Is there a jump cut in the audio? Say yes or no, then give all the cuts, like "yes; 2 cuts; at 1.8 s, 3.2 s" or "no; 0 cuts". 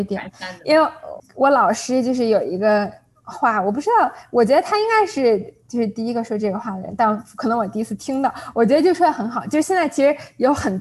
yes; 1 cut; at 1.2 s